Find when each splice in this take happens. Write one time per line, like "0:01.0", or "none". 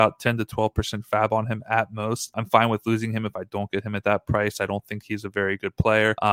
none

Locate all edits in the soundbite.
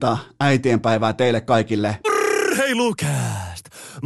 0:02.0

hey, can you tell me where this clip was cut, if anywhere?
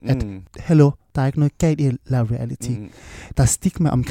none

